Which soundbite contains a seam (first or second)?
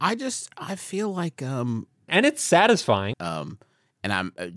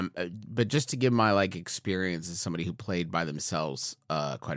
first